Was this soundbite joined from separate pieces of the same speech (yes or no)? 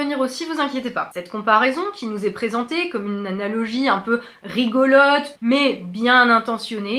yes